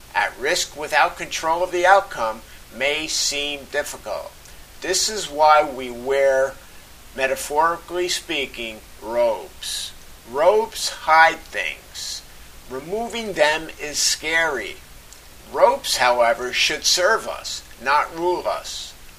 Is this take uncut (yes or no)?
yes